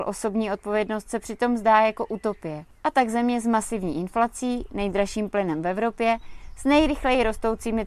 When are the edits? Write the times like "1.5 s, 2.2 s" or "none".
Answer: none